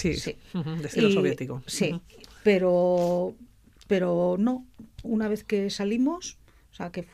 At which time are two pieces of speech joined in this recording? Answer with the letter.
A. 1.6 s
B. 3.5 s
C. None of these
C